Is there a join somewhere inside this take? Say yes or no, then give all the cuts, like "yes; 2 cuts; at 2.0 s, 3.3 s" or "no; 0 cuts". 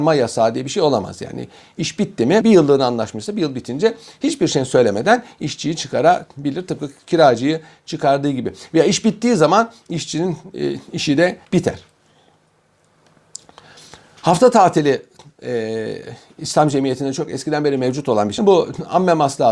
yes; 3 cuts; at 2.4 s, 11.5 s, 18.4 s